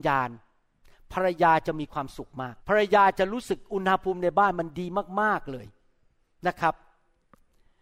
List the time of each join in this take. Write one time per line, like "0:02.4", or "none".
0:02.6